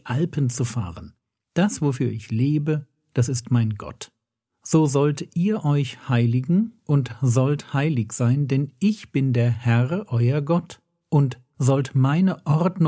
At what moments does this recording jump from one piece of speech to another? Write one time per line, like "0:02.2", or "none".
0:04.4